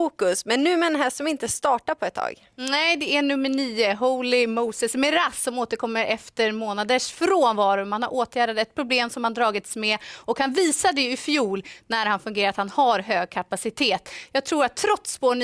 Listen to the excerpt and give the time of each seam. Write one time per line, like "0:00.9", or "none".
none